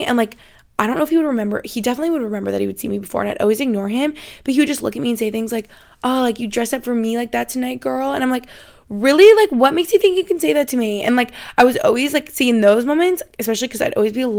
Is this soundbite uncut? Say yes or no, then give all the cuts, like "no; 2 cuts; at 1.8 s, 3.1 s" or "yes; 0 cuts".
yes; 0 cuts